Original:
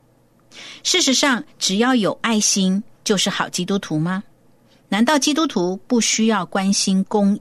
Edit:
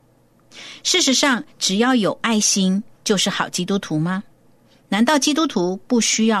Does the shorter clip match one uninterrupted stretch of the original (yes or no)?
yes